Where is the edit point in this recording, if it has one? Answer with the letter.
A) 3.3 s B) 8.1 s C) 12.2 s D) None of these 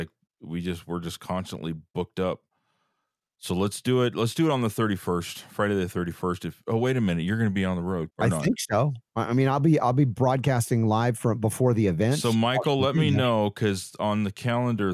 B